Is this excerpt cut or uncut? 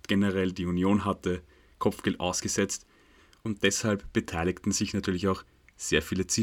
cut